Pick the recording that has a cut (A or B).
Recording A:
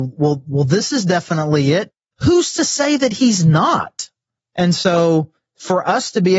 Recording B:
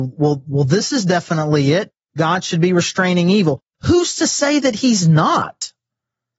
A